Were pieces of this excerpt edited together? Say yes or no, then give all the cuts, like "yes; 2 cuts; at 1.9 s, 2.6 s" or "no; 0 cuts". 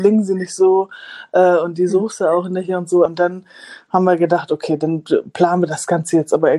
yes; 1 cut; at 3.1 s